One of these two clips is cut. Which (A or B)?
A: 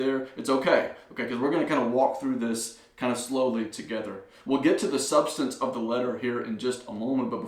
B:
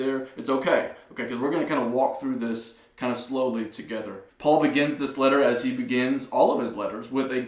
B